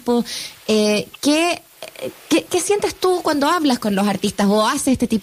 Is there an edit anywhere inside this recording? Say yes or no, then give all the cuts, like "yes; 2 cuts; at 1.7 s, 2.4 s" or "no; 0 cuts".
yes; 1 cut; at 2.5 s